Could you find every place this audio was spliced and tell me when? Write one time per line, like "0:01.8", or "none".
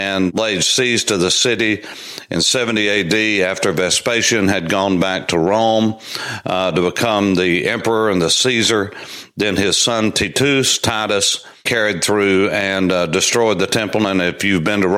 none